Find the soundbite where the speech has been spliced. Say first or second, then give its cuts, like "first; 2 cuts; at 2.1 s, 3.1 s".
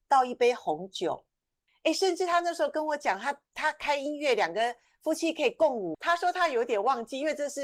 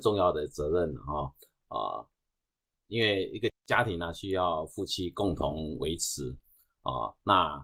first; 2 cuts; at 1.7 s, 5.9 s